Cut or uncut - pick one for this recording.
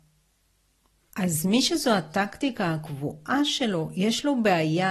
cut